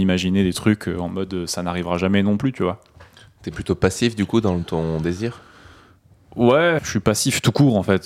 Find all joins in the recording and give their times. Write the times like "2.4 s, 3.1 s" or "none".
6.8 s